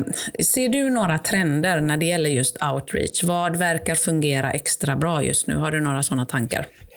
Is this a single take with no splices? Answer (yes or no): yes